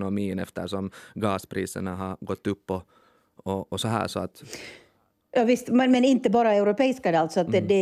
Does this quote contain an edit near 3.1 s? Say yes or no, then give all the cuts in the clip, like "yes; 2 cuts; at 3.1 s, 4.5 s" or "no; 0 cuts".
no; 0 cuts